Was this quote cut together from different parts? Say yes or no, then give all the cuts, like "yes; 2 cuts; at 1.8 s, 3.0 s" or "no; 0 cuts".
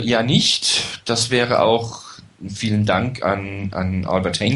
no; 0 cuts